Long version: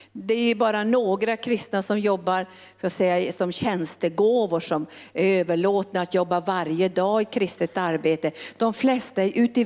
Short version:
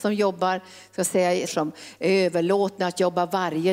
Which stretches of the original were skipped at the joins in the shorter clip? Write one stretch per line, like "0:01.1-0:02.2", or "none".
0:03.3-0:04.6